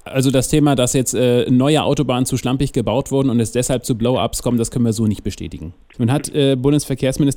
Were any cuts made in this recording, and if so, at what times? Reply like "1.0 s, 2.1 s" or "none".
5.9 s